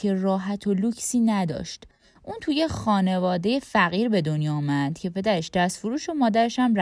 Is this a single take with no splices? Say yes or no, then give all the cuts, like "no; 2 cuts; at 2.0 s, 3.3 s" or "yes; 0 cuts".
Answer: yes; 0 cuts